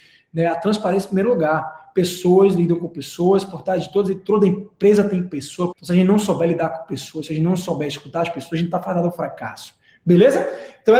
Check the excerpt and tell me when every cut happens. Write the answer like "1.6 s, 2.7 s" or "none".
5.7 s